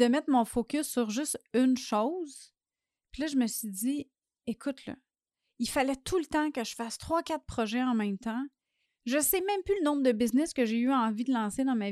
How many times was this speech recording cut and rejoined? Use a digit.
1